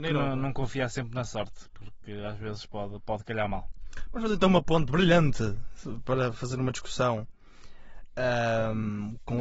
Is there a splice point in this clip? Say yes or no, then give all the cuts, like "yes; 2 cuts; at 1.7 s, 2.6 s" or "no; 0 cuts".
no; 0 cuts